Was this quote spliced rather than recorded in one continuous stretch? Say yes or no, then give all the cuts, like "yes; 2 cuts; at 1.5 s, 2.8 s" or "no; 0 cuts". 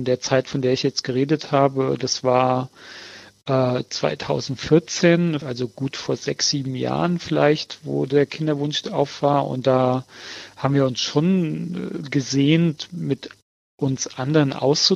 yes; 1 cut; at 5.4 s